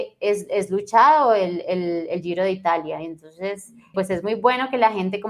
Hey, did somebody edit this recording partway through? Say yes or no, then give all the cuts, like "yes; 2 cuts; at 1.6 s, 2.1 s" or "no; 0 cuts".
yes; 1 cut; at 3.9 s